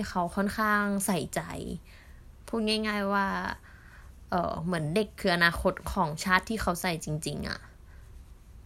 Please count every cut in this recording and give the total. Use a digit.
1